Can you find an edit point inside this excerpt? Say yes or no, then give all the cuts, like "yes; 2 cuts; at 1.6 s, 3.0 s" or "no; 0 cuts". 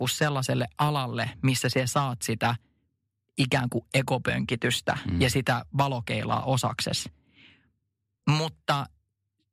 no; 0 cuts